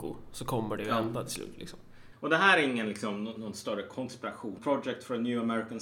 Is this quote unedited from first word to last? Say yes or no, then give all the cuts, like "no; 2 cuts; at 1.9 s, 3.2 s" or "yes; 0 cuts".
no; 2 cuts; at 2.1 s, 4.6 s